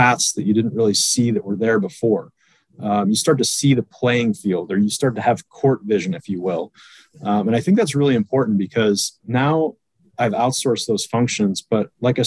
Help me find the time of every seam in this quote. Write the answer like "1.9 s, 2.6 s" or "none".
none